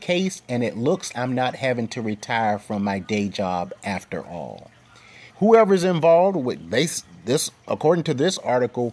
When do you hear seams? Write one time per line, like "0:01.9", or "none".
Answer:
0:01.1
0:05.3